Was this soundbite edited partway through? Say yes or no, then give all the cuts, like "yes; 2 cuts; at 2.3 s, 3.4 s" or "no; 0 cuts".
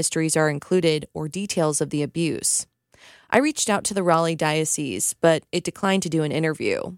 no; 0 cuts